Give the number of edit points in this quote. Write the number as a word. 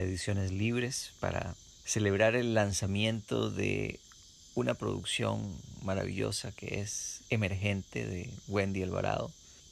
one